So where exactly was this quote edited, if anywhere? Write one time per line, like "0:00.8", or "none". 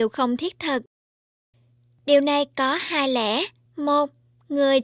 0:03.7